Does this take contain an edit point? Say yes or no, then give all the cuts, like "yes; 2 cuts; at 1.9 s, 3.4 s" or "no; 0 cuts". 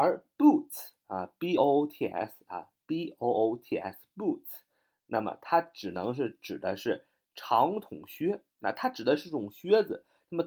no; 0 cuts